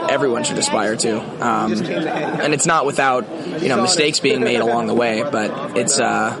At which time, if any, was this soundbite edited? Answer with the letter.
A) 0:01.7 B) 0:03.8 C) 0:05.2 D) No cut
D